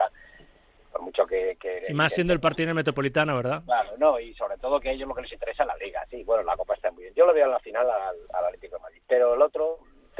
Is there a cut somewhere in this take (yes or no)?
no